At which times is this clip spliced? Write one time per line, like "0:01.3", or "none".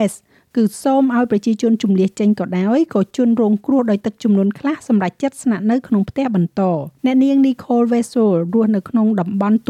0:07.0

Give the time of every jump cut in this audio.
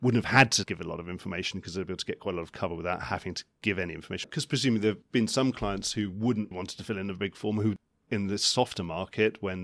0:04.2
0:06.5

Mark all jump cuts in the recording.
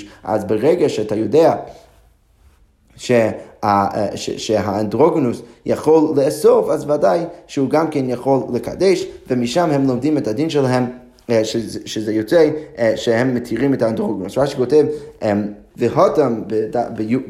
0:15.7

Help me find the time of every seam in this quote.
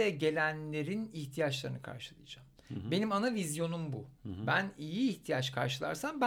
0:04.1

